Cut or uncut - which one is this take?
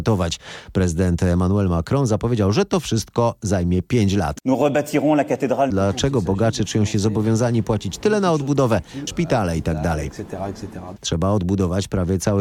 cut